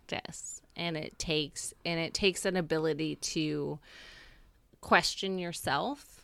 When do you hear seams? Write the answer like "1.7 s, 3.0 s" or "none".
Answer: none

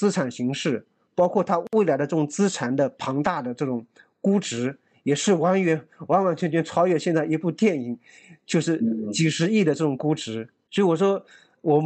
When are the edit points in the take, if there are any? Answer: 10.7 s

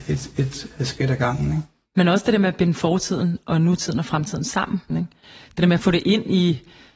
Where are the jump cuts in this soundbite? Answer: 4.9 s

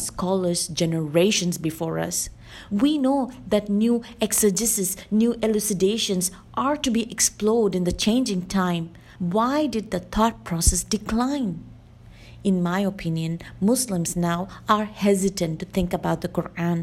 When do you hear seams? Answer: 2.7 s, 9.2 s

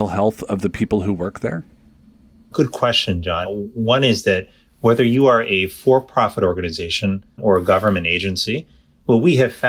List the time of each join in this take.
3.5 s, 7.4 s

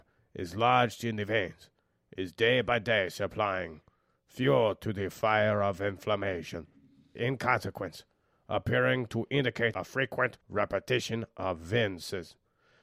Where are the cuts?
7.2 s, 10.4 s

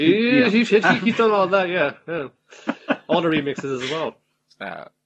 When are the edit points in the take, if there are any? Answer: none

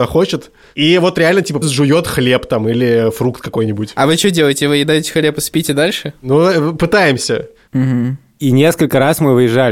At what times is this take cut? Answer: 1.6 s, 7.7 s

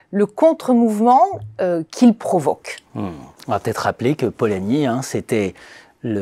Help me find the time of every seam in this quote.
none

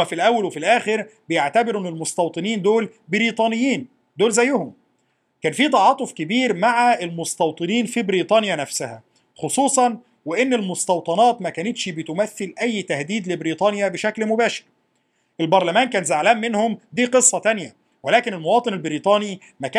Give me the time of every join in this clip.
none

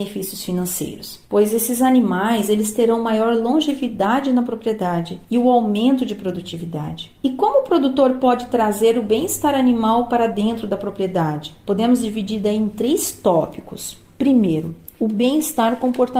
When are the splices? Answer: none

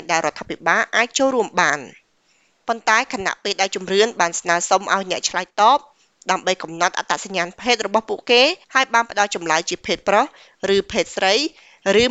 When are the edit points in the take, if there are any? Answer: 8.6 s

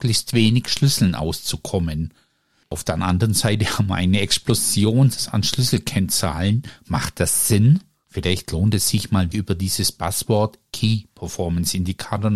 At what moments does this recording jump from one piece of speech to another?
8.0 s, 9.3 s

